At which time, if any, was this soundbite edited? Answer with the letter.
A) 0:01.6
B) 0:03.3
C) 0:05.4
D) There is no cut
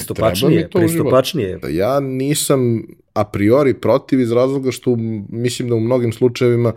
A